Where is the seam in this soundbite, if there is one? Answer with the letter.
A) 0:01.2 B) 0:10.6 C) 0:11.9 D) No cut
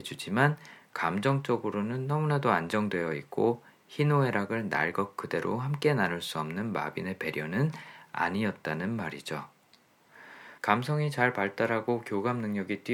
B